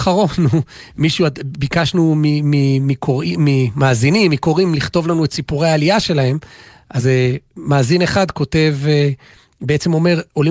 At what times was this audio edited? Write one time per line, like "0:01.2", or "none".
none

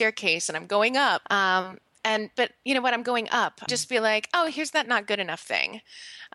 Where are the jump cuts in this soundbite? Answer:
0:01.2
0:03.7

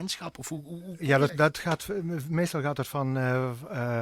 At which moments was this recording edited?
0:01.3

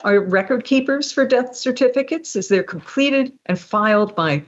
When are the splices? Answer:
none

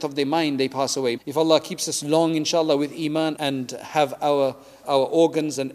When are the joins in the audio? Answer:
0:01.2
0:03.4
0:04.8

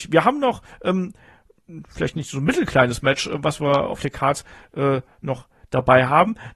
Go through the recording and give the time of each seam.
none

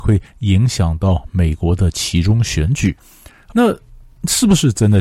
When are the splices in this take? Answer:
0:03.5

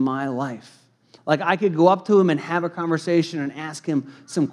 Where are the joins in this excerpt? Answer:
0:01.2

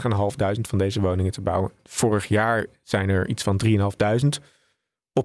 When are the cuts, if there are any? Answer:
none

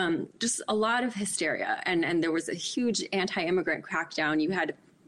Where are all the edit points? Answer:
none

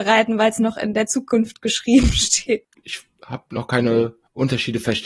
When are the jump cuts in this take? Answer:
0:02.7

